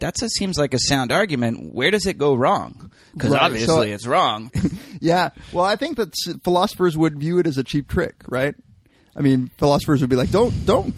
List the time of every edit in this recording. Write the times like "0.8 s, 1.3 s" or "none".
4.5 s